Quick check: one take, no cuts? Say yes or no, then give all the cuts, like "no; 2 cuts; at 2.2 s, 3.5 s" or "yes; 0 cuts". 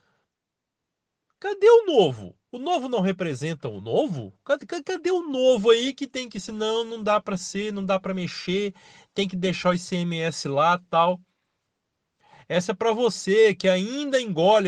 no; 1 cut; at 2.5 s